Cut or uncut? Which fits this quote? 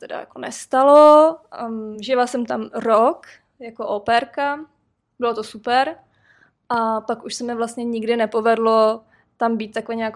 uncut